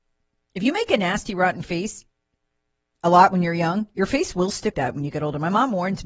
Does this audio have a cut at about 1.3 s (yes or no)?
no